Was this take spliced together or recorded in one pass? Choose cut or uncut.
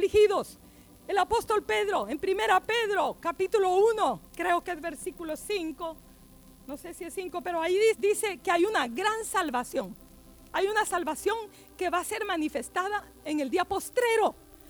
cut